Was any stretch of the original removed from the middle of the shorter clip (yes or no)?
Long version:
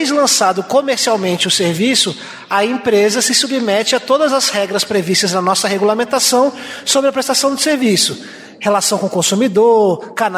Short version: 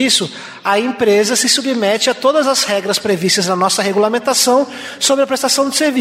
no